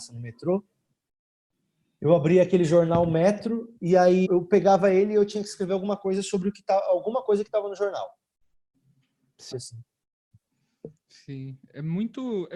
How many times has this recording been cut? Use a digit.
2